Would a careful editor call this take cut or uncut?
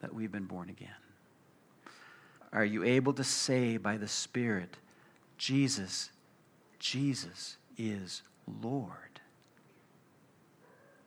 cut